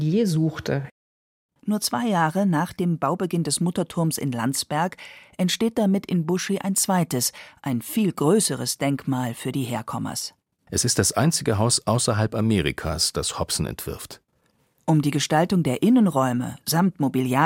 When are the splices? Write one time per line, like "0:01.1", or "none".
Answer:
0:01.6
0:10.7